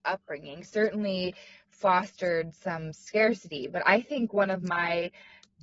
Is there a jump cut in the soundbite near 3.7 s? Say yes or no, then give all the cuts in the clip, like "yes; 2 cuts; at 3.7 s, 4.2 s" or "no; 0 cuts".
no; 0 cuts